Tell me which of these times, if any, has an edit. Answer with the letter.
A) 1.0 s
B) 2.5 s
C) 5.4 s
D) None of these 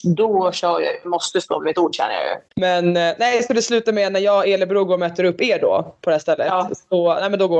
B